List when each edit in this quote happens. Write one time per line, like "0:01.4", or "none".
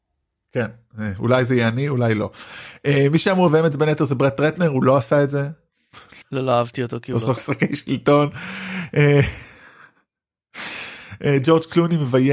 0:06.2
0:07.4